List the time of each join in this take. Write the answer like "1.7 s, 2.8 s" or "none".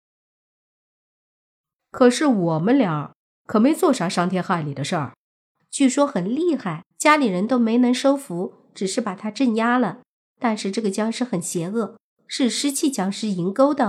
5.6 s, 6.9 s